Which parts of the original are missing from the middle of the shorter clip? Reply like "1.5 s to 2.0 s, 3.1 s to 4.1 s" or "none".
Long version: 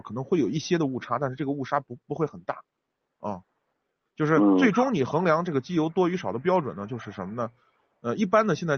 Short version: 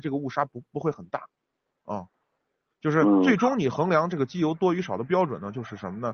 none